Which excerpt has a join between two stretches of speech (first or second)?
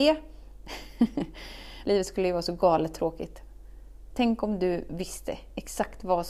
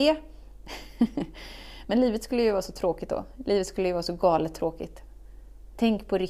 first